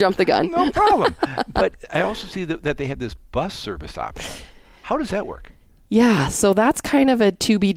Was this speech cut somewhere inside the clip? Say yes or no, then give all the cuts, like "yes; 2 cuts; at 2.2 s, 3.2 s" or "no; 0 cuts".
no; 0 cuts